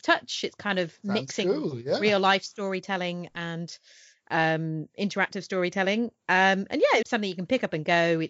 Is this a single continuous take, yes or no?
no